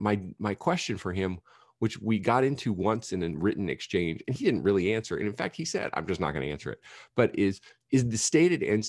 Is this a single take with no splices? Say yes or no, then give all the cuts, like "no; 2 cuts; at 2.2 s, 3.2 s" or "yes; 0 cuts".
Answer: yes; 0 cuts